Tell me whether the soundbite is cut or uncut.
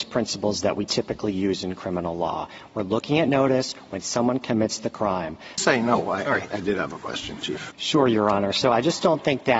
cut